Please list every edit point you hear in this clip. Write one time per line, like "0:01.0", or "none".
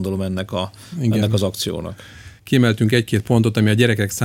0:02.4

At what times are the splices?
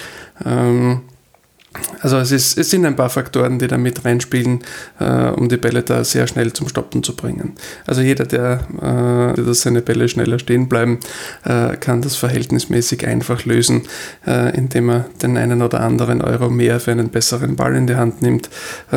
0:09.4

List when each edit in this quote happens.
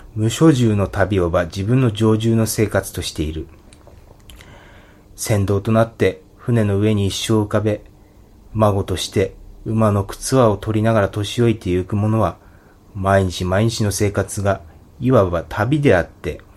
0:05.0

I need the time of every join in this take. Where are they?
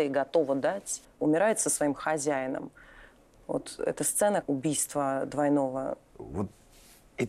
0:01.0
0:04.4
0:06.1

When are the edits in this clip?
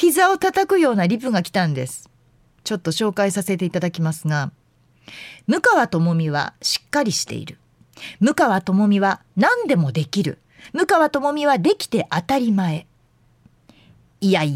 none

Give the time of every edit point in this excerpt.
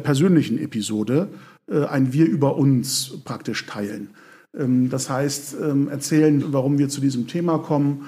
0:06.4

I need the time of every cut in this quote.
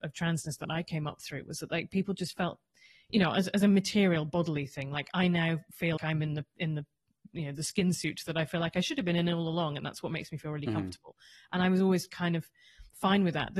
0:06.0

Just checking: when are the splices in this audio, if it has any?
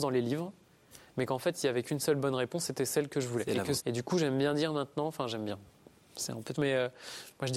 0:03.8
0:06.5

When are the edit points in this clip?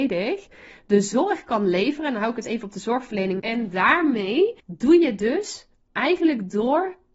0:03.4
0:04.6

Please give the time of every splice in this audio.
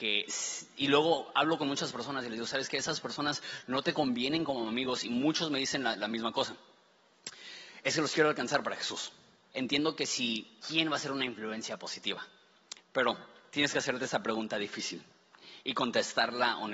0:09.5
0:10.6
0:12.8

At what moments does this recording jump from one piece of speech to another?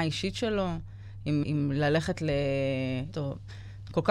0:01.4
0:03.1

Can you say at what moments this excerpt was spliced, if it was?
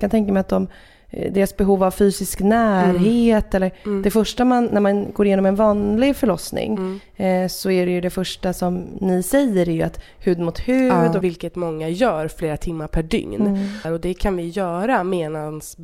0:11.2
0:13.8

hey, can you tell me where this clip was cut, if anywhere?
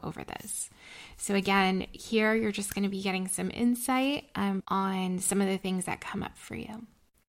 0:04.6

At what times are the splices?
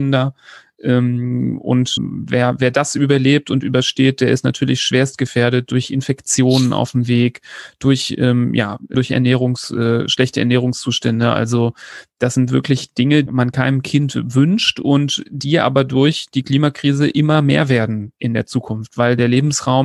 0:02.0
0:08.9
0:13.3

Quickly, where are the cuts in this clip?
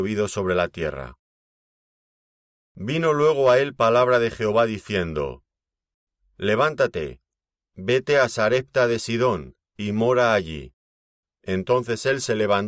0:11.2

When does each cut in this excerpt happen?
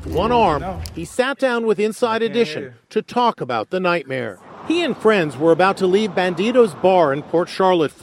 none

